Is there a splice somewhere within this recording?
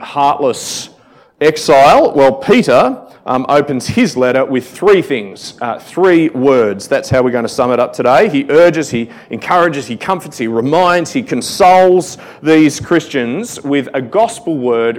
no; 0 cuts

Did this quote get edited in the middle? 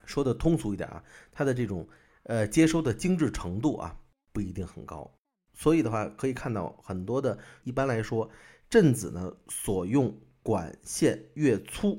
yes; 1 cut; at 7.6 s

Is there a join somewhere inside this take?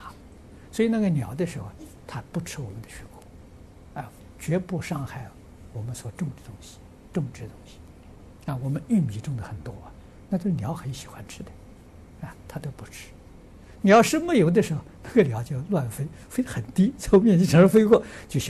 no; 0 cuts

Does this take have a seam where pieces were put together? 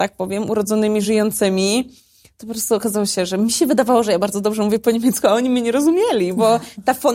no; 0 cuts

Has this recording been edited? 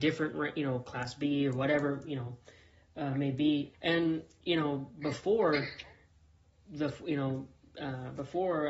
yes; 1 cut; at 3.7 s

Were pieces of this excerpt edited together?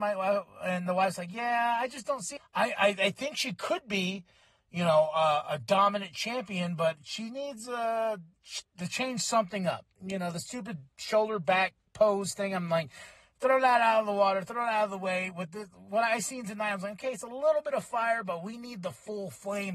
yes; 1 cut; at 2.4 s

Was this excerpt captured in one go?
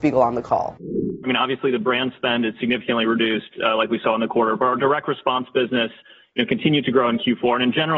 no; 1 cut; at 1.2 s

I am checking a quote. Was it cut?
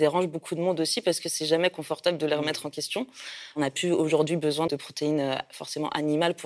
yes; 2 cuts; at 3.5 s, 4.7 s

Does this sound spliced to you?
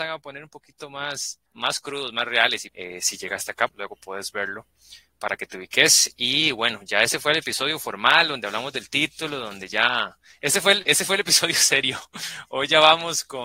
yes; 3 cuts; at 1.5 s, 2.7 s, 3.7 s

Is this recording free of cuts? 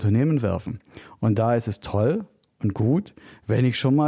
yes; 0 cuts

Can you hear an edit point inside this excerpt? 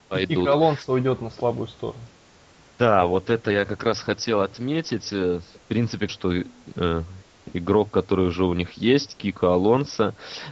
yes; 1 cut; at 6.1 s

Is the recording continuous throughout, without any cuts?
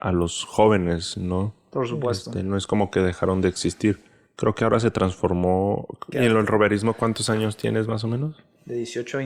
no; 1 cut; at 6.1 s

